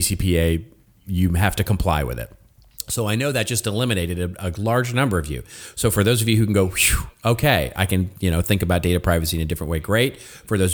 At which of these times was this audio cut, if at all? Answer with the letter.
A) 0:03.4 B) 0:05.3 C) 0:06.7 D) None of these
D